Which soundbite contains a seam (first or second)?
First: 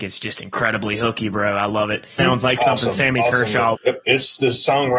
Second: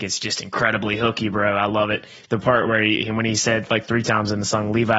first